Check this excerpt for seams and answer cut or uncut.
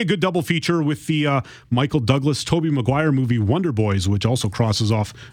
uncut